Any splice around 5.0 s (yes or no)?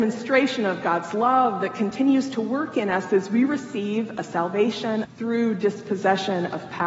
yes